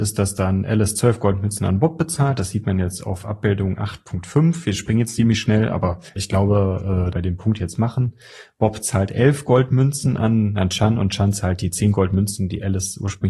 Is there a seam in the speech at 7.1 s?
yes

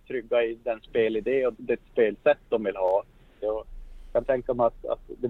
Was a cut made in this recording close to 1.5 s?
yes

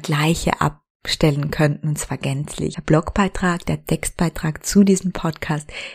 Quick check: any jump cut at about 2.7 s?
yes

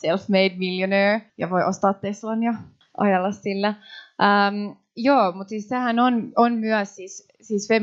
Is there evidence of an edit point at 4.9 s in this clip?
no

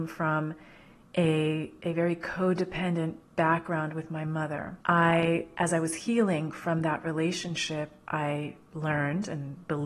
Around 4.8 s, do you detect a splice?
yes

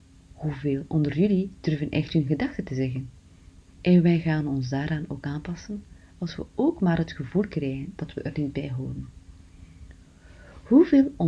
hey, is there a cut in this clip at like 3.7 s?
yes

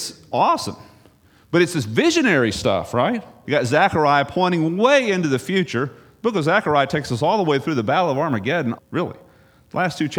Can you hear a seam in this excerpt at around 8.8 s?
yes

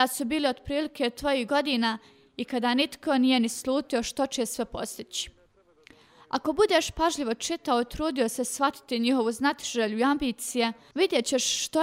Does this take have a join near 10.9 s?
yes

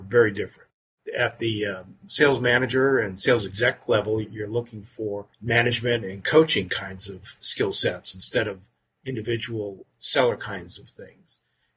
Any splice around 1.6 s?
no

